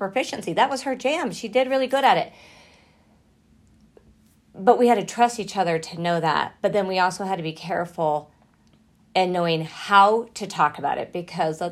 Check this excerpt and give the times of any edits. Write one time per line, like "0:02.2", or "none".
none